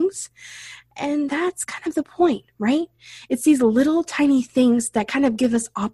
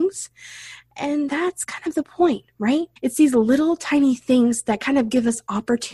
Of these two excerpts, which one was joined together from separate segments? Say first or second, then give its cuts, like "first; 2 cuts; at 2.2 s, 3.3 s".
second; 1 cut; at 3.0 s